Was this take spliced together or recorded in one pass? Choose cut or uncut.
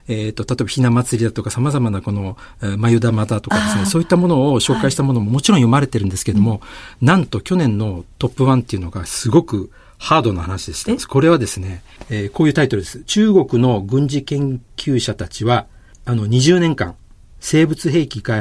uncut